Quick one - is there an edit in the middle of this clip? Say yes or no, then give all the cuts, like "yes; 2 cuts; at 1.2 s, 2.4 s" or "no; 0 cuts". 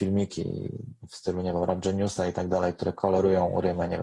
no; 0 cuts